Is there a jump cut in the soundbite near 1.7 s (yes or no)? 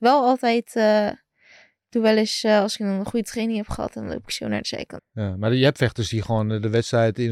no